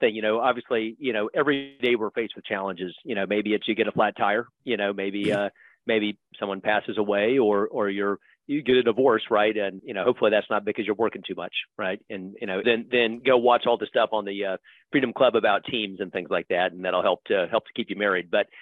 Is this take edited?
yes; 2 cuts; at 9.8 s, 12.6 s

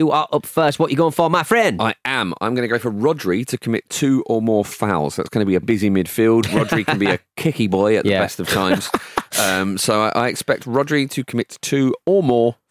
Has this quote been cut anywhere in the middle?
yes; 1 cut; at 5.6 s

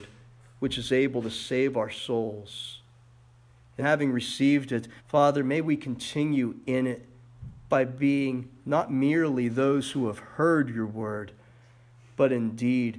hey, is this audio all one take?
no; 2 cuts; at 3.8 s, 5.0 s

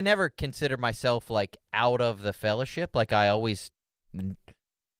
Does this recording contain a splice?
no; 0 cuts

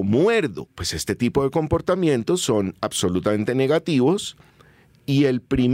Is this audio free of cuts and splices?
yes; 0 cuts

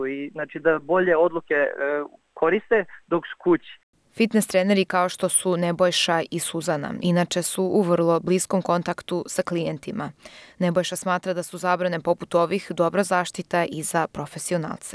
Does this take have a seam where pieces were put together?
no; 0 cuts

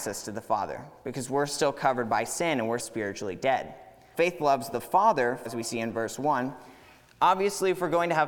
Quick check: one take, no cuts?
no; 3 cuts; at 2.8 s, 4.1 s, 5.5 s

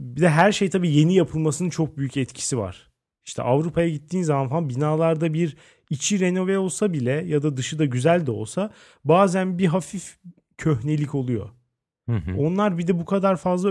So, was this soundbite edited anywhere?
no; 0 cuts

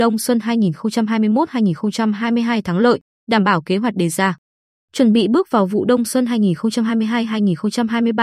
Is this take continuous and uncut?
yes; 0 cuts

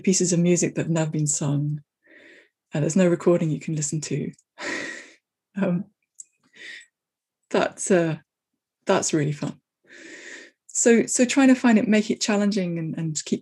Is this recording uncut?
yes; 0 cuts

